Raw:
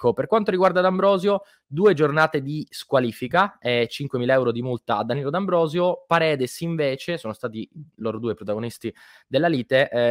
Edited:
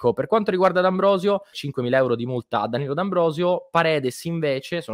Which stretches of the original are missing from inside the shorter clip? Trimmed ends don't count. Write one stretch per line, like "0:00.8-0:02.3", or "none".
0:01.5-0:03.9